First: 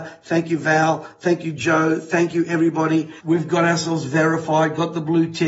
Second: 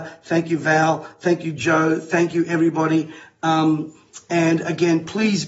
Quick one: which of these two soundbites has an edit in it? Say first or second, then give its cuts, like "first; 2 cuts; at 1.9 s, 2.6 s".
first; 1 cut; at 3.2 s